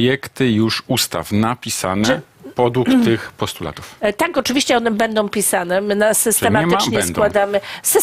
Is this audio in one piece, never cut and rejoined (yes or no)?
yes